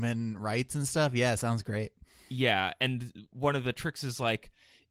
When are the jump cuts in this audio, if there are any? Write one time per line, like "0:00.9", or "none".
none